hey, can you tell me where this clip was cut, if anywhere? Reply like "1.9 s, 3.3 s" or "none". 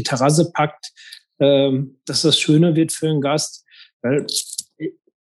none